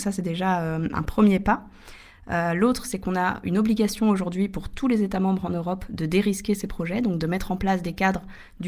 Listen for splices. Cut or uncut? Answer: cut